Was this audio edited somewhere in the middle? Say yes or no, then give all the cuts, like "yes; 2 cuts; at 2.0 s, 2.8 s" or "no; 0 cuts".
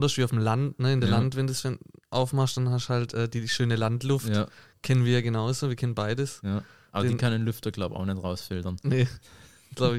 no; 0 cuts